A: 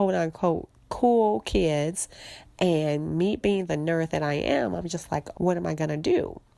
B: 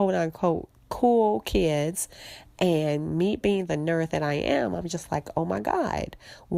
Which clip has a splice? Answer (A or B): A